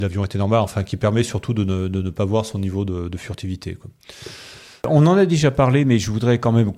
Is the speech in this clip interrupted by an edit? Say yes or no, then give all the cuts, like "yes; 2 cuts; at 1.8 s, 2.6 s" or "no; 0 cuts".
no; 0 cuts